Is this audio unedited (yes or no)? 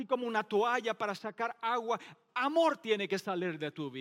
yes